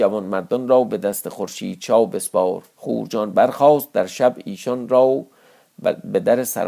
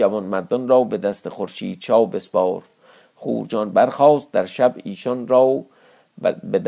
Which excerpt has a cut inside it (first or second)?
first